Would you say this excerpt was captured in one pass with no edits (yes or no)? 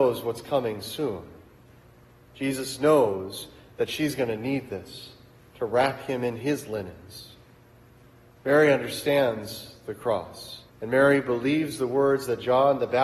no